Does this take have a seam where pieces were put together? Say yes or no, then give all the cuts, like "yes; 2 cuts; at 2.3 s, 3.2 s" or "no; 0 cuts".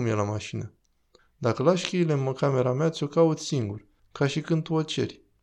yes; 2 cuts; at 1.2 s, 4.0 s